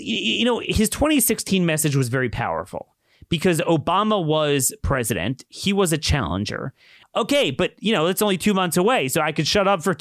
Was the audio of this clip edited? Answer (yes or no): yes